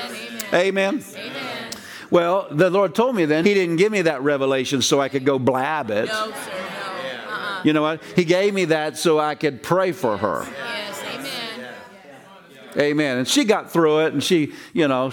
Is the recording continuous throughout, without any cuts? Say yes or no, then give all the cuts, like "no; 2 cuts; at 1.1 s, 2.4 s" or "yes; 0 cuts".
no; 1 cut; at 3.4 s